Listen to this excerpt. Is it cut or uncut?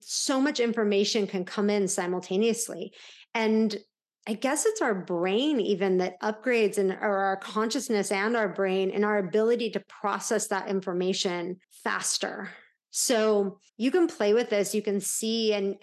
cut